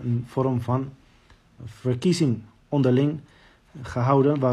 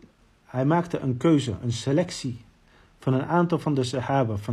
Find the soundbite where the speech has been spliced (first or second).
first